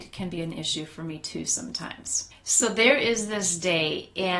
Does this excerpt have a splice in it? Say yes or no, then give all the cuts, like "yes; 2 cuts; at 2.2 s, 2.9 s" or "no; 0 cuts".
yes; 1 cut; at 2.3 s